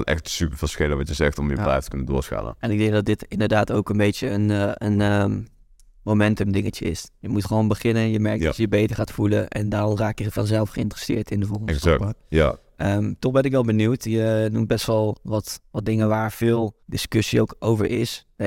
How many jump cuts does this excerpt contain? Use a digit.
1